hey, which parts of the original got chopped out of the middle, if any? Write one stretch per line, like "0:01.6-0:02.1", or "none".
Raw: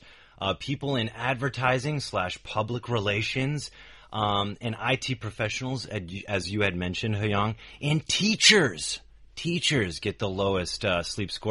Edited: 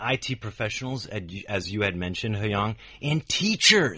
none

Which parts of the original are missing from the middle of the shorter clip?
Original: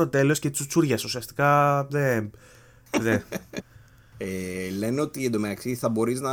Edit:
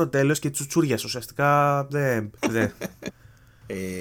0:02.4-0:02.9

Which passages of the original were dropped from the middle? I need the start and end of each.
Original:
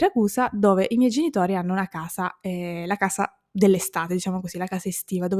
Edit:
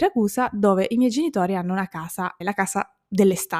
0:02.4-0:02.8

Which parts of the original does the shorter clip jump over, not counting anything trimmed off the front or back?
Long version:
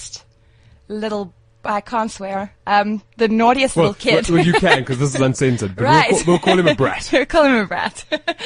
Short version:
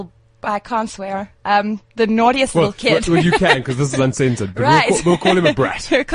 none

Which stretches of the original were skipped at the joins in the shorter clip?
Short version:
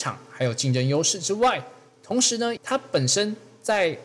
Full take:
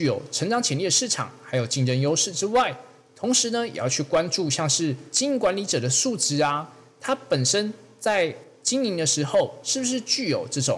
0:03.7-0:06.9

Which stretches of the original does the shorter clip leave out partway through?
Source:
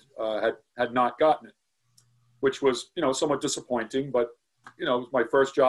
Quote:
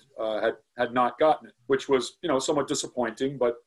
0:01.6-0:02.3

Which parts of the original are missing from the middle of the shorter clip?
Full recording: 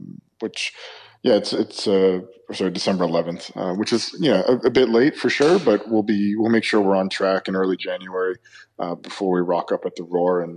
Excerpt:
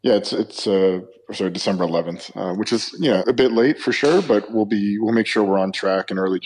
0:04.4-0:04.6

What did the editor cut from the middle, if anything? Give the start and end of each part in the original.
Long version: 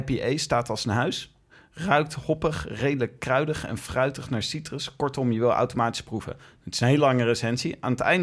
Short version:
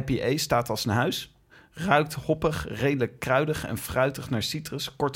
none

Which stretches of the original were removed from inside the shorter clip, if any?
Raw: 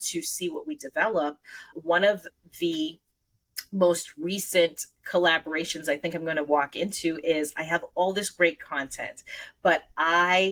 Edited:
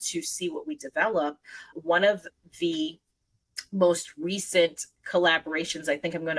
none

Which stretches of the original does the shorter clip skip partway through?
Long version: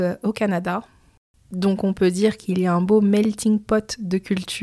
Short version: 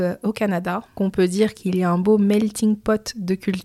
0:01.0-0:01.8

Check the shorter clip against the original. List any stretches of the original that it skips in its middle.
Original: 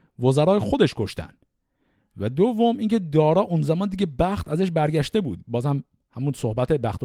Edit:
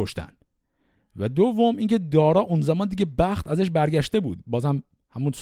none

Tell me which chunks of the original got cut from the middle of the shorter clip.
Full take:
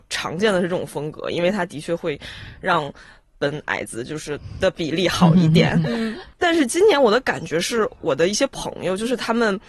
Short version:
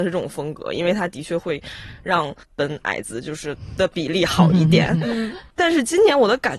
0:03.0-0:03.3

